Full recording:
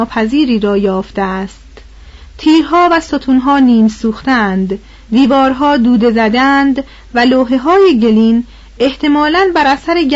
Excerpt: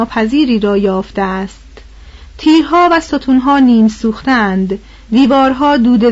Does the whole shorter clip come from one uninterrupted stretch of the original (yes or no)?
yes